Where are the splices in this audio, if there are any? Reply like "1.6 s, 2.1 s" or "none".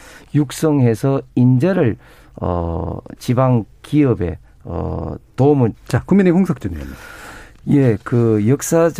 3.2 s, 5.7 s